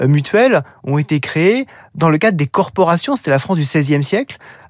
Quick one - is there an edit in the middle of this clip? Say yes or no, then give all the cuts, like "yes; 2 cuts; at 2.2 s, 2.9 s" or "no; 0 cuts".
no; 0 cuts